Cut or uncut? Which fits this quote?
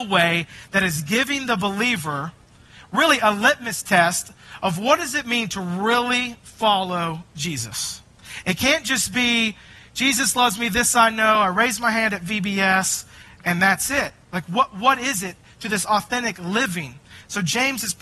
uncut